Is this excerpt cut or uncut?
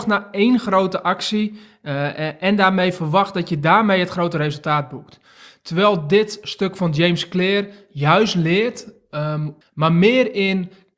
cut